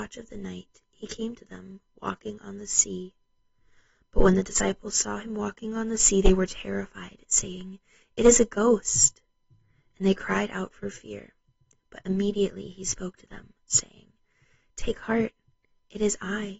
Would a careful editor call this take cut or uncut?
uncut